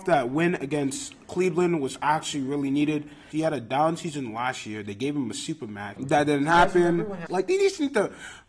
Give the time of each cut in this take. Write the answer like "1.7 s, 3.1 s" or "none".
3.3 s, 6.0 s, 7.3 s